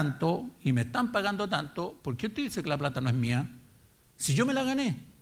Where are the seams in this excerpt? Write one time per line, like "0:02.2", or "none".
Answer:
0:04.1